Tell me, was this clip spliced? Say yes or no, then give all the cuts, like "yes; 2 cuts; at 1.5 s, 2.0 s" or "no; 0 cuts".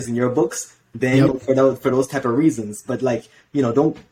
yes; 1 cut; at 1.3 s